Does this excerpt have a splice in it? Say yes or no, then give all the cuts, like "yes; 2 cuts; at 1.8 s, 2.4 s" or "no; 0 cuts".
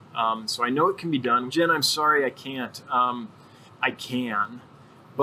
yes; 2 cuts; at 1.5 s, 3.7 s